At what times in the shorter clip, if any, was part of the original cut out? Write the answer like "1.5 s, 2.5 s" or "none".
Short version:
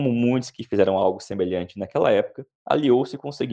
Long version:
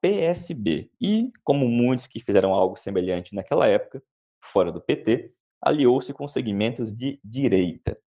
2.6 s